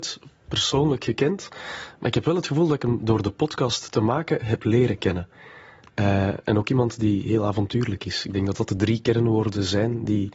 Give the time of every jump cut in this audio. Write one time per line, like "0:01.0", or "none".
0:05.9

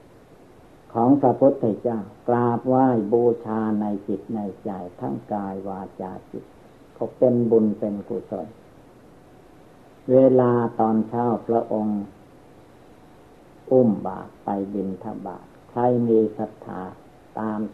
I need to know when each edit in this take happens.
0:02.2

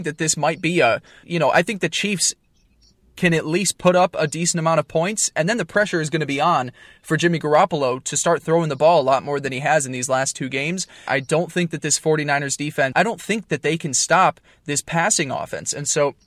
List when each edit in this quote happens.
0:01.2
0:11.1
0:12.9

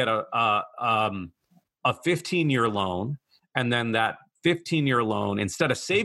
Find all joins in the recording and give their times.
none

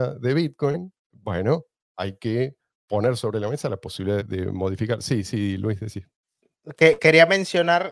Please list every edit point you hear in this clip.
0:01.0
0:04.2

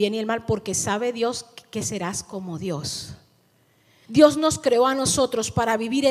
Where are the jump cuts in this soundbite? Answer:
0:04.0

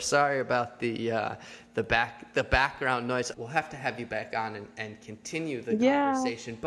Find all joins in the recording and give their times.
0:03.3

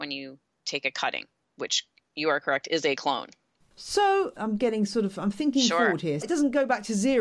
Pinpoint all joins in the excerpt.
0:04.4
0:06.2

